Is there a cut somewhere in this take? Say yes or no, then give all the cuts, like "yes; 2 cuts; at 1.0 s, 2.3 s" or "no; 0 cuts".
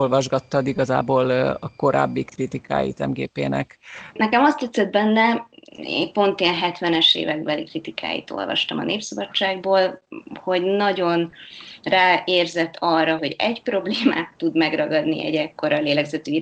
yes; 2 cuts; at 4.1 s, 13.2 s